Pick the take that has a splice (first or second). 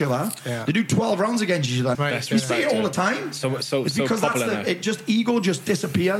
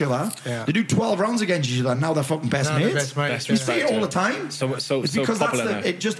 first